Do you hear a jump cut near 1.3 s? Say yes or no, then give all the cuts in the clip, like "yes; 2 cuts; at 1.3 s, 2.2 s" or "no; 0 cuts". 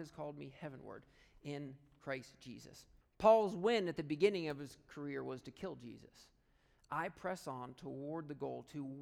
no; 2 cuts; at 3.0 s, 6.8 s